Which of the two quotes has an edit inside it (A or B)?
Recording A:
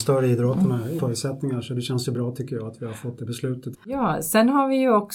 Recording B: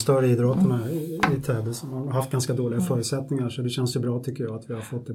A